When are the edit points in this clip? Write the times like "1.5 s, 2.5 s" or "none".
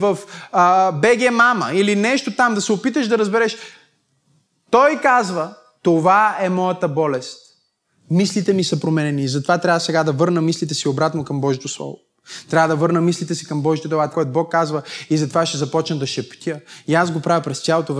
14.1 s